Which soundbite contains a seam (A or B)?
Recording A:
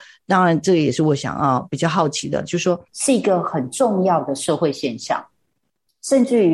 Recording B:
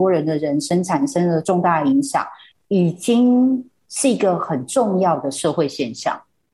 A